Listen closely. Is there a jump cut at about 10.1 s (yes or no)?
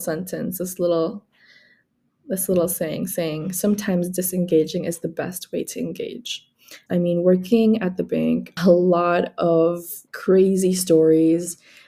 yes